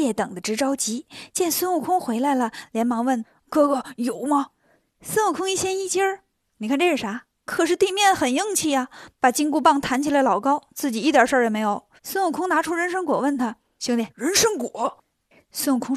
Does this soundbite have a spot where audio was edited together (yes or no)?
yes